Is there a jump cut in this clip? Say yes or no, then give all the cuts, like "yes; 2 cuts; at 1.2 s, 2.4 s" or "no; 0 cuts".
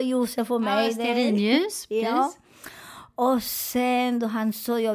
no; 0 cuts